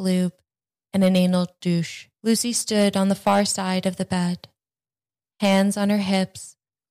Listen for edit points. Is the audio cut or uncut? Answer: cut